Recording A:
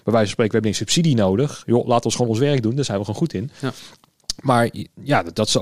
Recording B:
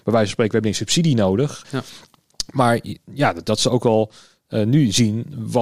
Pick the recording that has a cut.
B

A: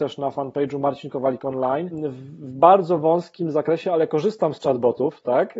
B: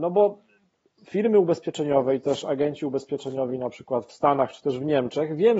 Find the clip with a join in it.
A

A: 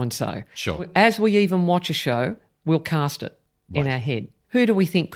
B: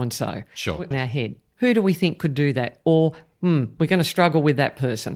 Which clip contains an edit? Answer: B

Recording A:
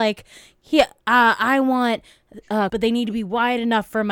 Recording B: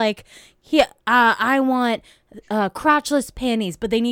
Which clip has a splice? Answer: A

